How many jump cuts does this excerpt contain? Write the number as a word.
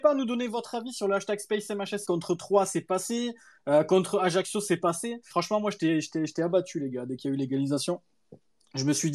two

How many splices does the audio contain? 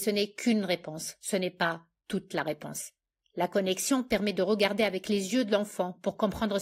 one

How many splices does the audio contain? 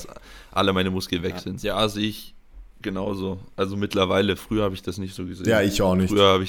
one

